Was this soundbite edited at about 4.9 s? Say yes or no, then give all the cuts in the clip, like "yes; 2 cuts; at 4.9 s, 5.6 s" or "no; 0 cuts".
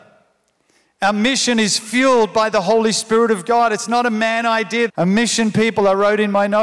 yes; 1 cut; at 4.9 s